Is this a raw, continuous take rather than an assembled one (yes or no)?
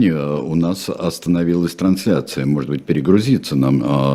yes